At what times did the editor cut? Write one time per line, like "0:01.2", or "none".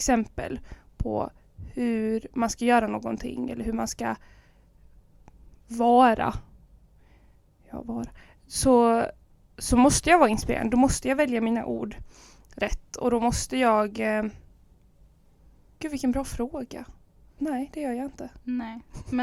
0:15.8
0:17.4